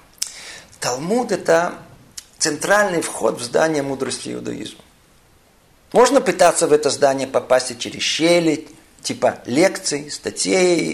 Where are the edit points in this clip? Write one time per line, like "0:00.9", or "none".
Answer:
none